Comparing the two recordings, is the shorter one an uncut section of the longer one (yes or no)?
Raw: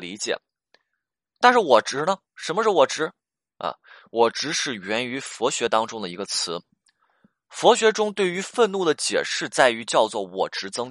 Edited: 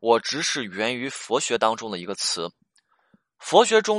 yes